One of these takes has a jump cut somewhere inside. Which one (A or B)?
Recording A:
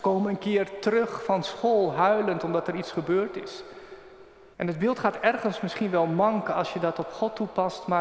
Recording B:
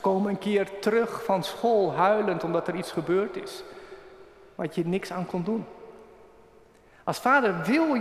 A